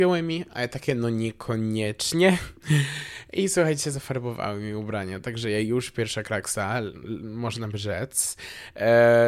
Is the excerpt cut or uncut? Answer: uncut